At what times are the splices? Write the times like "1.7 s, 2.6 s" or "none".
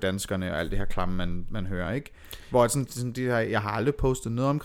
2.9 s